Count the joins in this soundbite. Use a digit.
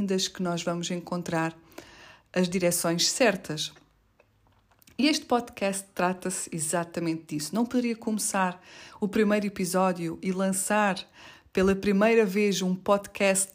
0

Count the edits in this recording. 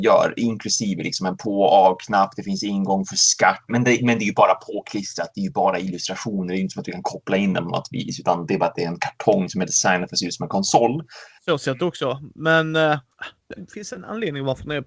3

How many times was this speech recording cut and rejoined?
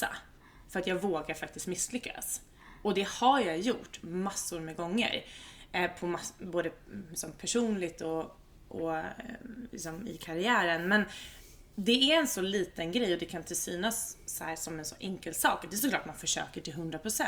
0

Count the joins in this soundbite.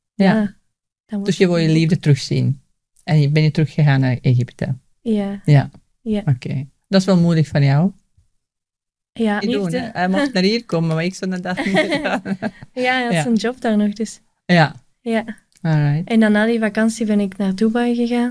1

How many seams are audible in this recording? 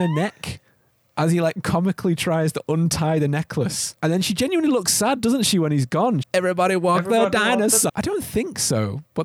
2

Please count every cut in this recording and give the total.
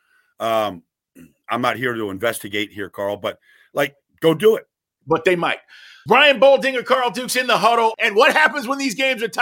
2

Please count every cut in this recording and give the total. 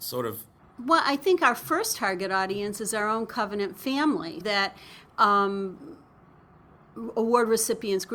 1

